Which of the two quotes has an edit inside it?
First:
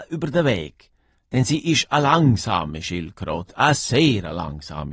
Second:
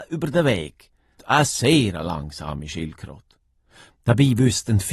second; 1 cut; at 1.2 s

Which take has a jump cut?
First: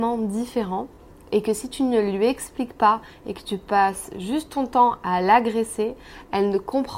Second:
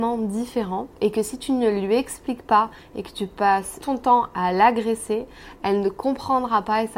second; 2 cuts; at 0.9 s, 3.8 s

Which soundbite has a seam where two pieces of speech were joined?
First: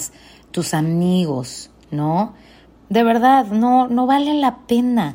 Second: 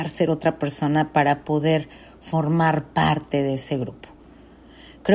first; 2 cuts; at 2.8 s, 3.9 s

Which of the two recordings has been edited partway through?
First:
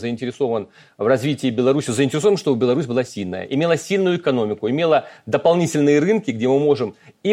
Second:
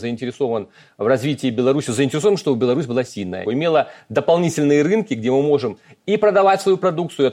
second; 1 cut; at 3.4 s

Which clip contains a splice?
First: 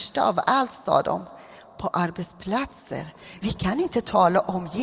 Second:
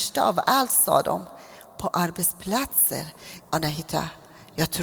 second; 1 cut; at 3.4 s

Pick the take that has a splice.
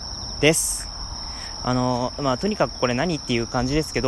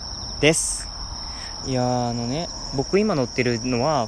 second; 1 cut; at 1.6 s

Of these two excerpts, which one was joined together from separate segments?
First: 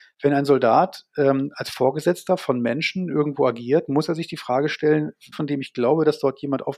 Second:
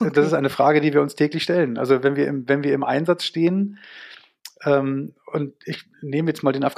first; 1 cut; at 5.3 s

